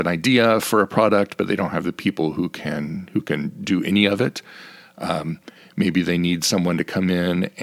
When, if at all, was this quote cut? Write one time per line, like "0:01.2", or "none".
none